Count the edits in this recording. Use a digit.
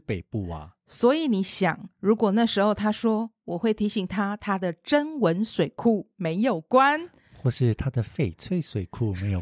0